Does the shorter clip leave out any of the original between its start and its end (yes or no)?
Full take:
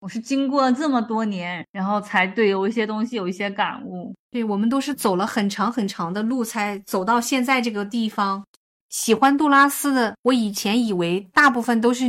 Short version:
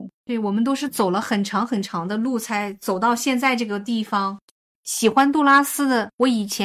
no